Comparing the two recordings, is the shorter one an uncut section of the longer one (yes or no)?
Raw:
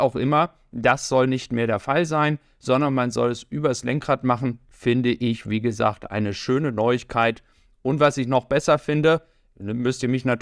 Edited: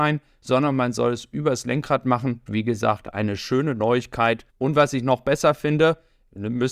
no